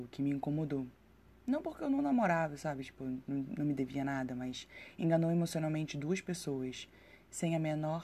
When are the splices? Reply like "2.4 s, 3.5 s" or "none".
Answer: none